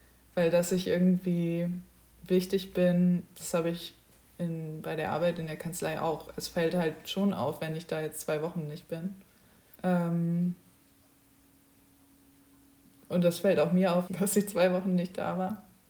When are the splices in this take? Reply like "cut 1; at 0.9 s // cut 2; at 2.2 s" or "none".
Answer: cut 1; at 9.7 s // cut 2; at 14.1 s